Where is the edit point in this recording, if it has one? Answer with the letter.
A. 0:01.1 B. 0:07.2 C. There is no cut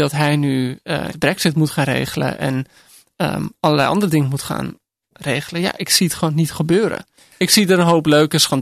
A